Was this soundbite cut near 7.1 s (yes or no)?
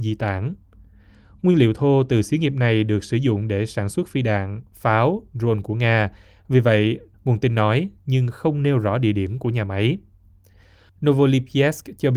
yes